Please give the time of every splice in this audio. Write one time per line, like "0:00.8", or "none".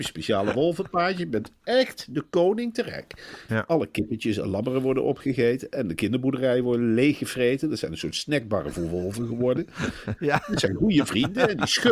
0:03.5
0:10.2